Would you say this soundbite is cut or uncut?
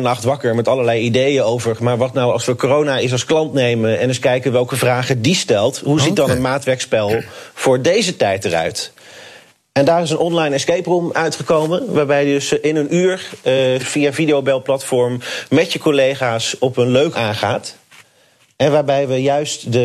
cut